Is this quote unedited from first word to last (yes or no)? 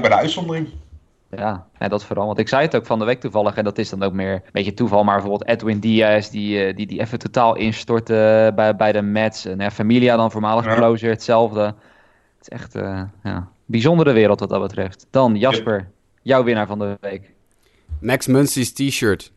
no